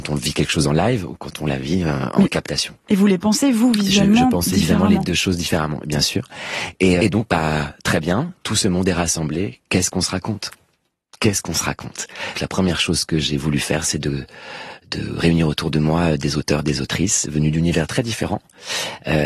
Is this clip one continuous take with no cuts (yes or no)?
no